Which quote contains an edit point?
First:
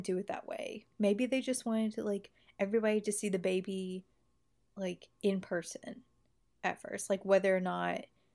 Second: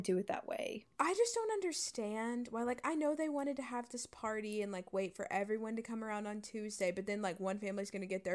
second; 1 cut; at 0.9 s

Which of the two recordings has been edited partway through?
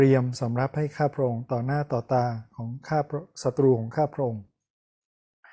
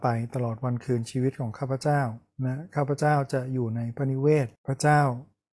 second; 1 cut; at 4.6 s

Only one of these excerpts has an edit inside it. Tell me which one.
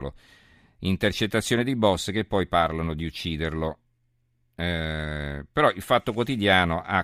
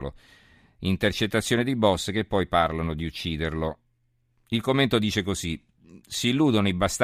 second; 1 cut; at 4.3 s

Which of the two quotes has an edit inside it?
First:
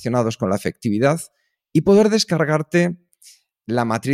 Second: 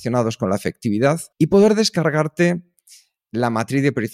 second; 1 cut; at 1.3 s

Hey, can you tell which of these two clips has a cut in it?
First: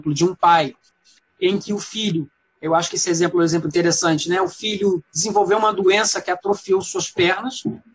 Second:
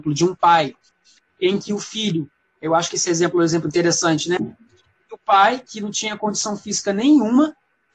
second; 1 cut; at 4.4 s

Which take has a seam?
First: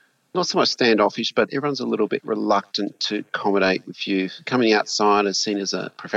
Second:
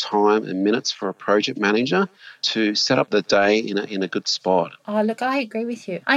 second; 2 cuts; at 3.1 s, 4.8 s

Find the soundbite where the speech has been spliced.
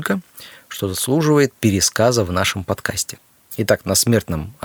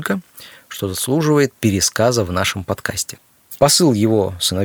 second; 1 cut; at 3.6 s

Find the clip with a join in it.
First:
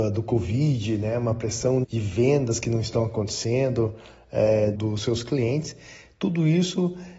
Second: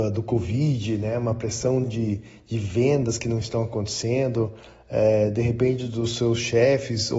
first; 2 cuts; at 1.8 s, 4.7 s

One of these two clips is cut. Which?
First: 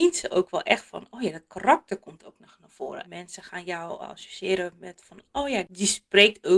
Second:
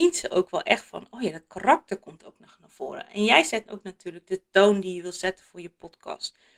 first; 1 cut; at 3.0 s

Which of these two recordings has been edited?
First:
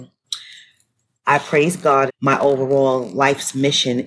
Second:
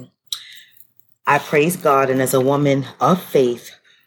first; 1 cut; at 2.1 s

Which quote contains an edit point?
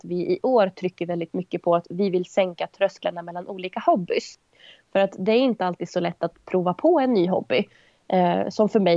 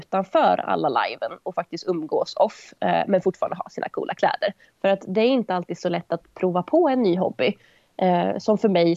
second; 1 cut; at 4.7 s

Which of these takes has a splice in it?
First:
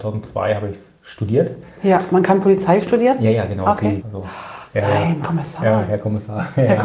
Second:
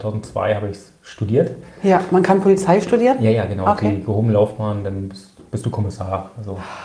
first; 1 cut; at 4.0 s

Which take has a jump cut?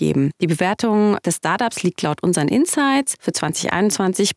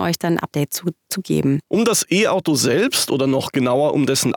second; 1 cut; at 1.6 s

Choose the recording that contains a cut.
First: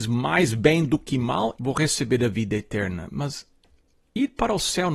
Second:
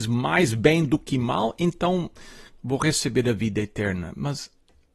first; 1 cut; at 1.6 s

